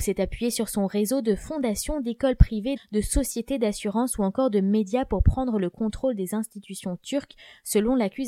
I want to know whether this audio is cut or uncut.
cut